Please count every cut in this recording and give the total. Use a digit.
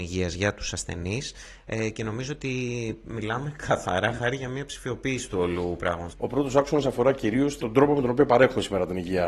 2